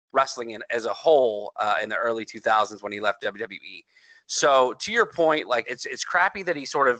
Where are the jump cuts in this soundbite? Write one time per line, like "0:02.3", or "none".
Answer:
0:05.6